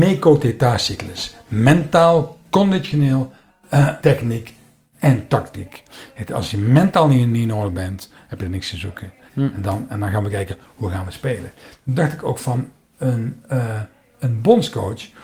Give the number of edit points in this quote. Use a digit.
2